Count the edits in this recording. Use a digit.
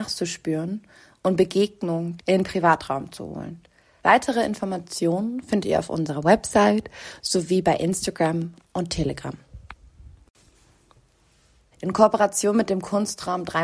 3